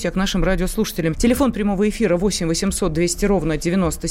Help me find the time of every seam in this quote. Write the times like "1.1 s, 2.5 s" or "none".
1.1 s

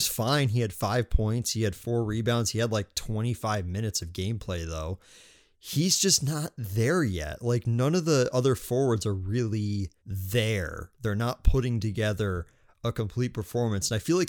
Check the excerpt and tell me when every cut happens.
10.0 s

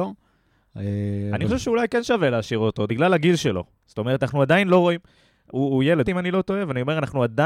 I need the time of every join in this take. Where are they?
2.9 s, 6.0 s

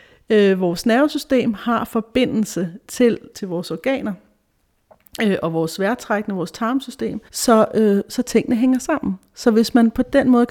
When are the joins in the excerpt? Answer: 3.3 s, 7.3 s

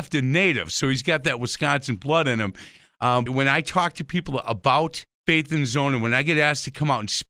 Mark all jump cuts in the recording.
3.3 s, 5.1 s

